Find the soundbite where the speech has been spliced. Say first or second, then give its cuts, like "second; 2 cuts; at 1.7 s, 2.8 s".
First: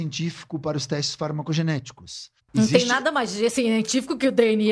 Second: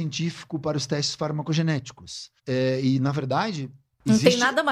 first; 1 cut; at 2.4 s